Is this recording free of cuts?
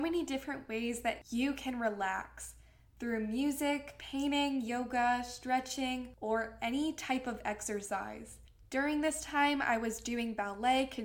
yes; 0 cuts

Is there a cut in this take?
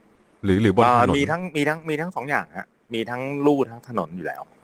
no; 0 cuts

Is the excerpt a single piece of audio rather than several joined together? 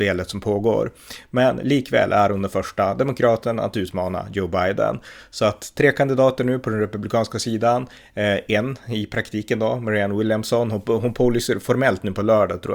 yes; 0 cuts

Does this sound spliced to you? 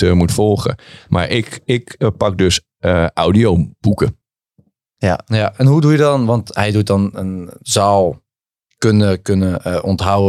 no; 0 cuts

